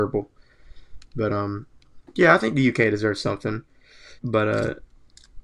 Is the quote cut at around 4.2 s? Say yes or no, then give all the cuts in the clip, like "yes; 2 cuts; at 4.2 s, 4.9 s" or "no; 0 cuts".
yes; 1 cut; at 4.2 s